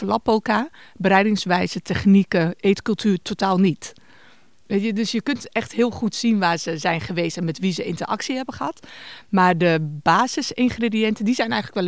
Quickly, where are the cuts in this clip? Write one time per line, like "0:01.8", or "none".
none